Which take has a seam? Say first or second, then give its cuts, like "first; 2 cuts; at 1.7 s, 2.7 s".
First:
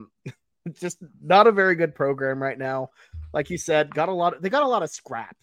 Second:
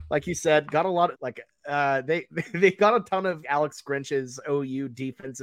second; 2 cuts; at 1.1 s, 3.4 s